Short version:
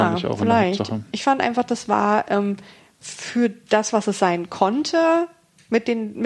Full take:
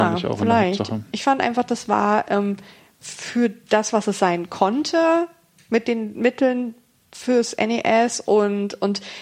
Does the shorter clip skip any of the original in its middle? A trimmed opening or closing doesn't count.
no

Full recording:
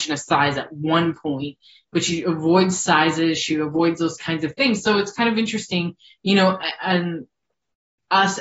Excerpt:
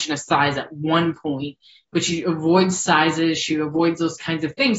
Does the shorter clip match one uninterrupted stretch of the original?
yes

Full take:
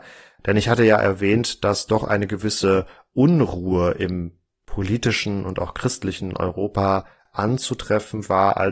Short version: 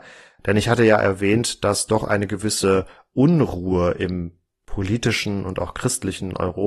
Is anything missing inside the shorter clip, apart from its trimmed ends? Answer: no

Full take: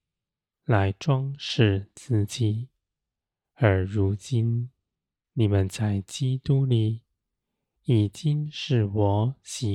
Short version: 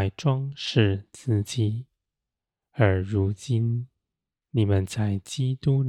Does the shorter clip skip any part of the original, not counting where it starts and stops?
no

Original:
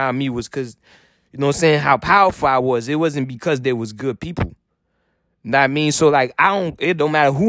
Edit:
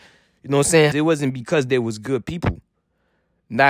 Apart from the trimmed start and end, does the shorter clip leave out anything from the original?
yes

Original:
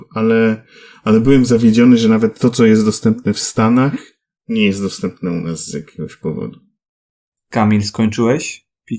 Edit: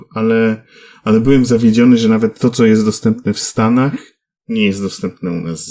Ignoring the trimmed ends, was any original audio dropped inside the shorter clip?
no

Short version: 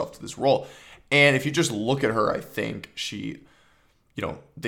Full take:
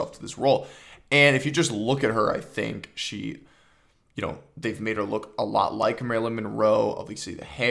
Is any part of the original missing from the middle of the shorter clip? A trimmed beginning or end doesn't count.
no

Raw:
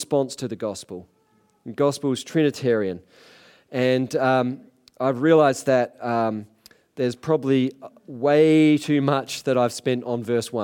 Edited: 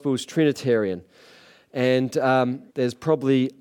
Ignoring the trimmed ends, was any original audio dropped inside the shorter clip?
yes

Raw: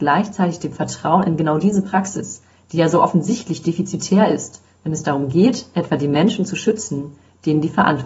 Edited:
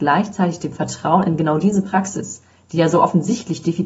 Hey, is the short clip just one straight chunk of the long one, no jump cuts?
yes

